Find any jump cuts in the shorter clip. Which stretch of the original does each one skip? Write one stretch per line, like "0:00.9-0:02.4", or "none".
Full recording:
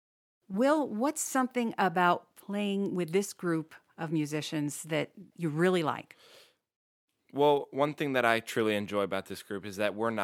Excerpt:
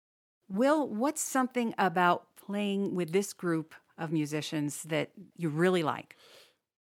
none